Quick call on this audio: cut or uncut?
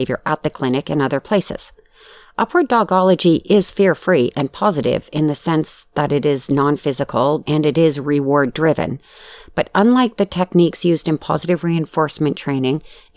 cut